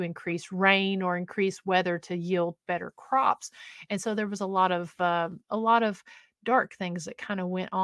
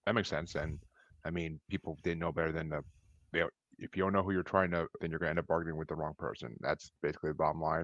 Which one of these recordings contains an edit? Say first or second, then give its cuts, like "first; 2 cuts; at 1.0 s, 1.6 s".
second; 1 cut; at 5.0 s